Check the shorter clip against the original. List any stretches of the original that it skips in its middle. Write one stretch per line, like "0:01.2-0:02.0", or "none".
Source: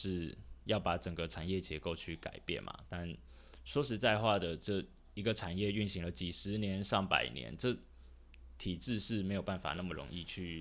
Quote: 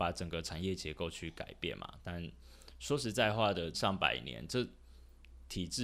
0:04.6-0:06.8